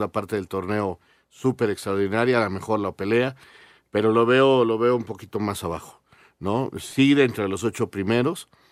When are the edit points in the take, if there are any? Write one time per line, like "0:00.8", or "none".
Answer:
none